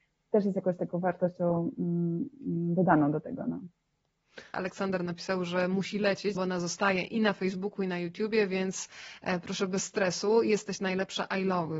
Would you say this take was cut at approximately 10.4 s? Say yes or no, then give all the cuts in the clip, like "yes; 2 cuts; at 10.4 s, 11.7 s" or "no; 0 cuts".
no; 2 cuts; at 4.5 s, 6.4 s